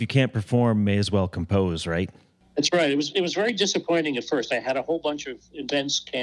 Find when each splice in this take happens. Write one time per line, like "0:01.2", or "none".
none